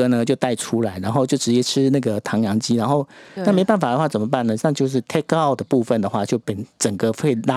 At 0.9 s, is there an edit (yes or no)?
no